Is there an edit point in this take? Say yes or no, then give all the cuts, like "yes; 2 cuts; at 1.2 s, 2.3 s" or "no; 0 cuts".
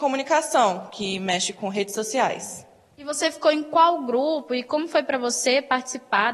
no; 0 cuts